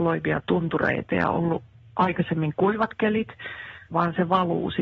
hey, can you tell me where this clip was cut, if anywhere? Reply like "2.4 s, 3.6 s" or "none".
3.9 s